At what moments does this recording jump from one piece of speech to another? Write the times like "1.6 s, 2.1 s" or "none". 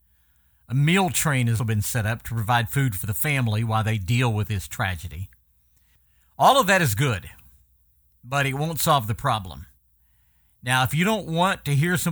1.6 s